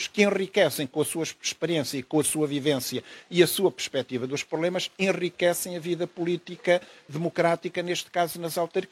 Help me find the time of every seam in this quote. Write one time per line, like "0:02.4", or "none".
none